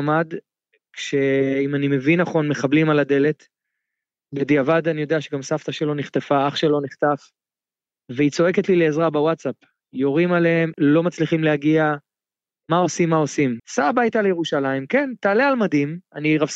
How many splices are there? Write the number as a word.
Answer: two